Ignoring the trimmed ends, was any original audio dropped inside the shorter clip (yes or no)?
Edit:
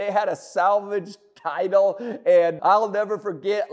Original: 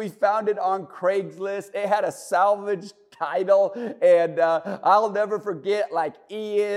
yes